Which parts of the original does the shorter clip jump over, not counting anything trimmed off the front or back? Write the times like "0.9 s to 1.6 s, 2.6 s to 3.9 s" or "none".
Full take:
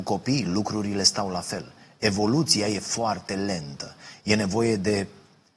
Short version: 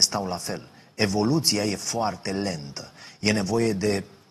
none